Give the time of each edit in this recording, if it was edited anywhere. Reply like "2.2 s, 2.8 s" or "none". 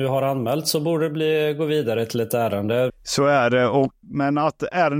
2.9 s, 4.0 s